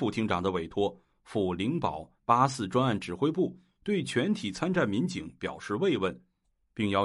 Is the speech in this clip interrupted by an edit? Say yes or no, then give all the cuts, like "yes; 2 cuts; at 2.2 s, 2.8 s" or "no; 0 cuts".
no; 0 cuts